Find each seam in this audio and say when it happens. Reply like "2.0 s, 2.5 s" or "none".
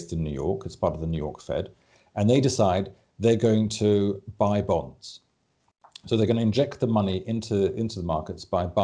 none